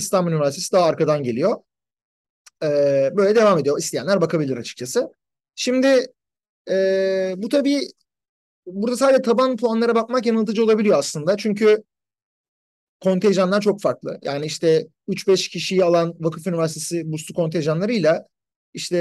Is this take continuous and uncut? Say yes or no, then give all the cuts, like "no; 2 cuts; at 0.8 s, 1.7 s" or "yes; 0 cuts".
yes; 0 cuts